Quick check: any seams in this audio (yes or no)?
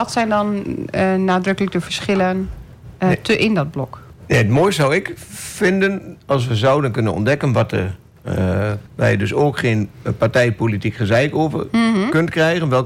yes